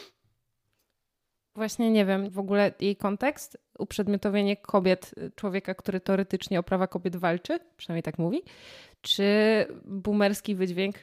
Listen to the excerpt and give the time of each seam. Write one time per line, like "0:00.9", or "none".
0:02.3